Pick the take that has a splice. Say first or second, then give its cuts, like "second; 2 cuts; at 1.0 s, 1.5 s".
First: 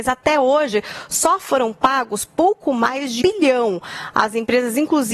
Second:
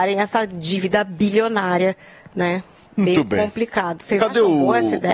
first; 1 cut; at 3.2 s